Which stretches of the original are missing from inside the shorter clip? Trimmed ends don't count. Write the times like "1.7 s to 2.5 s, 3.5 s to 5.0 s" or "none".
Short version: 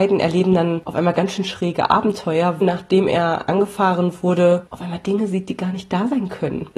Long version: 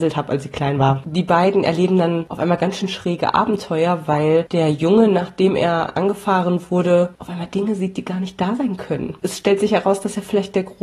4.1 s to 5.1 s